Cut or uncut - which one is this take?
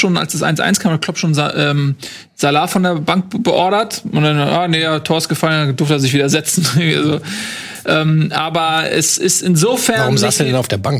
uncut